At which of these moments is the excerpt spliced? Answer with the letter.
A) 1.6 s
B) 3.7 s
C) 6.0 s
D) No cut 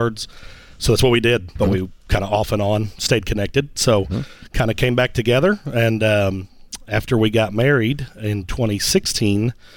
A